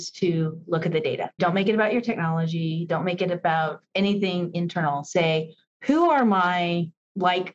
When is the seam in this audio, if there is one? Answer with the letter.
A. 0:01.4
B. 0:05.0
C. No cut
A